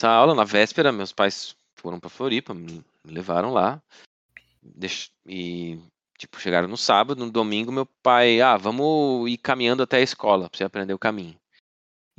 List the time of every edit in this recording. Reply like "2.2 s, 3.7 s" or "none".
none